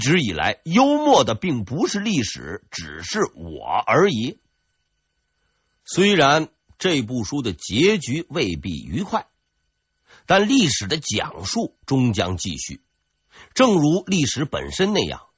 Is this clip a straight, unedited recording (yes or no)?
yes